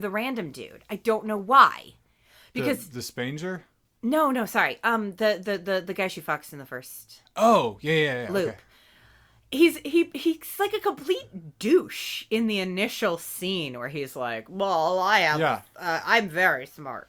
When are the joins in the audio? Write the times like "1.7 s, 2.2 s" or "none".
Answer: none